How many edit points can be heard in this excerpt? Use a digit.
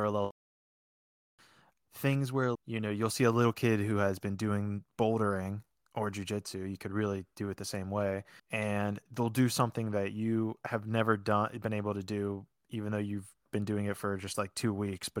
2